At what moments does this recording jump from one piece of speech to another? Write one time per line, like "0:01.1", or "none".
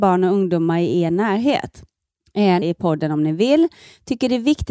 0:02.6